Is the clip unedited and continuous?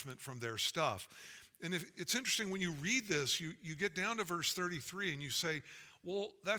yes; 0 cuts

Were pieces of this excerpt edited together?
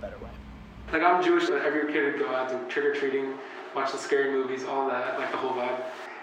yes; 1 cut; at 1.5 s

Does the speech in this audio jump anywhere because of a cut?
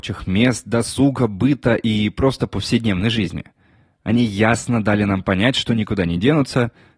no; 0 cuts

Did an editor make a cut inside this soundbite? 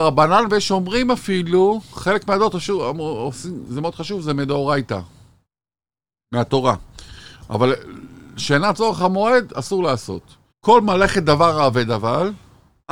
yes; 1 cut; at 10.5 s

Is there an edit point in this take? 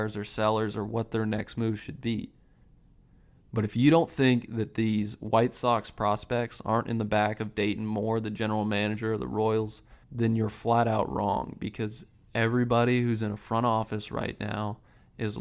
yes; 1 cut; at 10.0 s

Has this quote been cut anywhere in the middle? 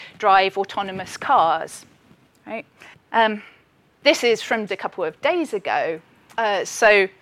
yes; 2 cuts; at 2.9 s, 4.7 s

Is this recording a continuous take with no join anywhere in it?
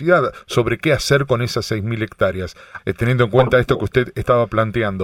no; 1 cut; at 2.8 s

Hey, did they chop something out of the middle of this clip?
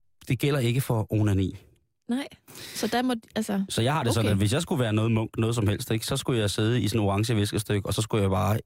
no; 0 cuts

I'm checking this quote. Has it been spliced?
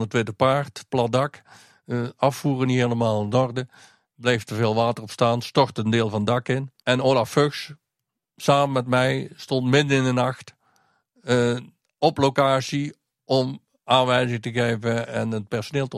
yes; 2 cuts; at 6.8 s, 15.1 s

